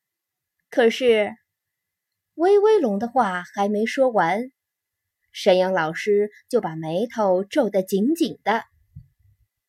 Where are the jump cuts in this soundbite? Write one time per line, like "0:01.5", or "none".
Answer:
none